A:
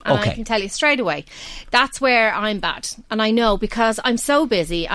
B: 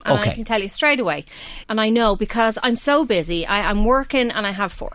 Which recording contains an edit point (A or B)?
B